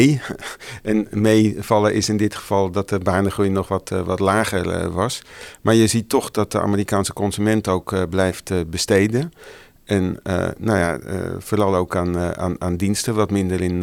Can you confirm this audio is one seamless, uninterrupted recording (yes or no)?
yes